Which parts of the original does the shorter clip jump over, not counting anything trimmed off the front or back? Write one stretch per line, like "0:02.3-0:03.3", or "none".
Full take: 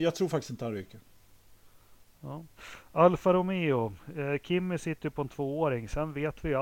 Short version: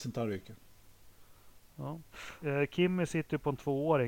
0:02.9-0:04.1